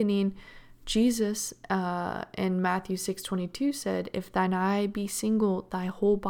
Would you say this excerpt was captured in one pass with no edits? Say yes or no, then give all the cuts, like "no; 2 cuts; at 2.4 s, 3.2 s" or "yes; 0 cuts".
yes; 0 cuts